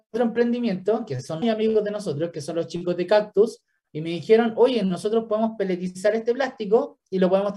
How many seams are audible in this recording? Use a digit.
1